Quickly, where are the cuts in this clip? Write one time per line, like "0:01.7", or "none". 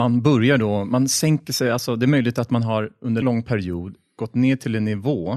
0:03.2